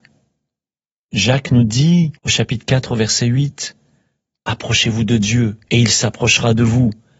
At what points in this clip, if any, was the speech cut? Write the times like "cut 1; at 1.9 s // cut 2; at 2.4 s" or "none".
cut 1; at 1.0 s // cut 2; at 2.2 s